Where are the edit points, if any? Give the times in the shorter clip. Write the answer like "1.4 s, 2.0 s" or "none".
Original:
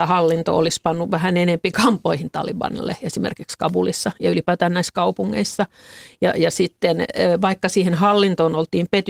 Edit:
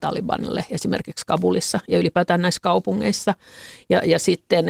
none